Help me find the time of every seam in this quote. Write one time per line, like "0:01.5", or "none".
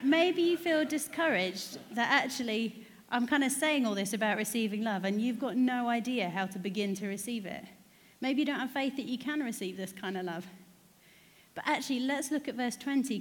none